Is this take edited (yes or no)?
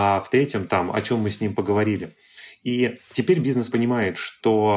yes